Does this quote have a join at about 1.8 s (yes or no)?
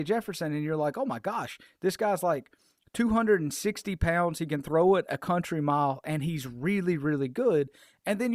no